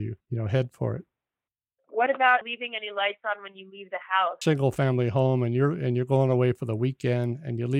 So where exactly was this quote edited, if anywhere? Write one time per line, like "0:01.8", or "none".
0:02.4
0:04.4